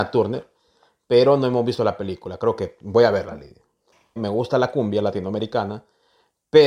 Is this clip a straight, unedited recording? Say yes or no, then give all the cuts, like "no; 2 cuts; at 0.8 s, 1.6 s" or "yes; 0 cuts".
no; 1 cut; at 4.2 s